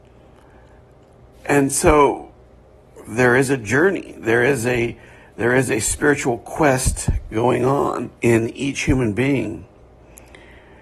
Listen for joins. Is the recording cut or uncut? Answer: cut